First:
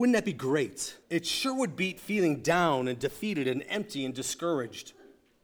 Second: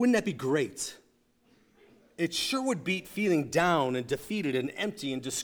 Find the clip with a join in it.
first; 1 cut; at 1.0 s

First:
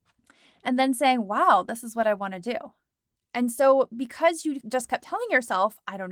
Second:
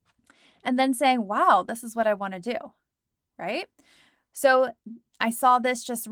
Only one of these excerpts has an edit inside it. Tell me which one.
first; 1 cut; at 3.2 s

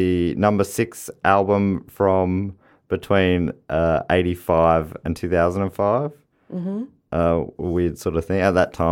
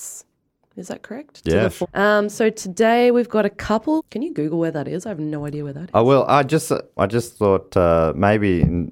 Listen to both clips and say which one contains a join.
second; 3 cuts; at 1.8 s, 4.0 s, 7.0 s

